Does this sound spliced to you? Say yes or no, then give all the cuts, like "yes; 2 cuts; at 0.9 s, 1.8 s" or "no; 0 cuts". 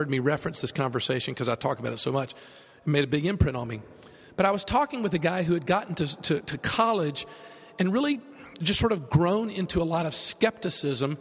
no; 0 cuts